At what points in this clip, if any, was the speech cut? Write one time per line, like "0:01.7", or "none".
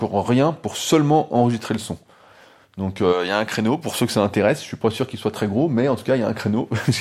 none